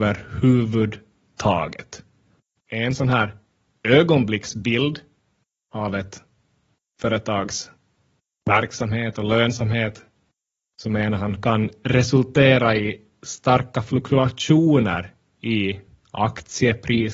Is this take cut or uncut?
cut